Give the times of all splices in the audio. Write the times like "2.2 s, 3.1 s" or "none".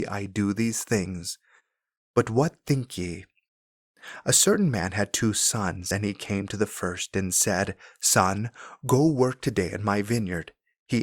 none